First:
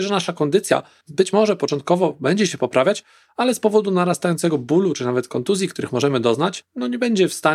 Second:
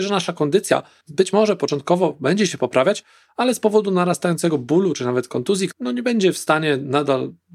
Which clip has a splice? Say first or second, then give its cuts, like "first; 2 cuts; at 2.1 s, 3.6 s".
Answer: second; 1 cut; at 5.7 s